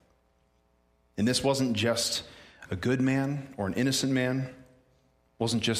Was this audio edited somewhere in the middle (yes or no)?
no